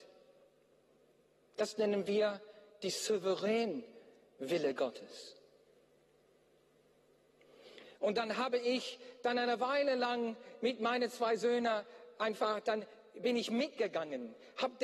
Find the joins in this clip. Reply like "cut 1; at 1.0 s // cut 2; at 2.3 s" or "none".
cut 1; at 7.9 s